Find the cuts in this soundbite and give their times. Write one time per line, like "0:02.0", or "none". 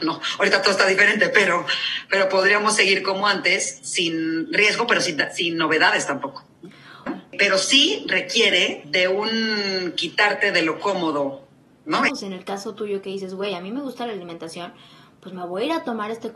0:07.1
0:12.1